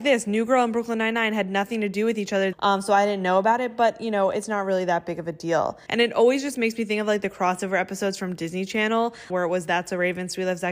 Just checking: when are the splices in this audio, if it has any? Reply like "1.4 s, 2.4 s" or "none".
2.5 s, 5.9 s, 9.3 s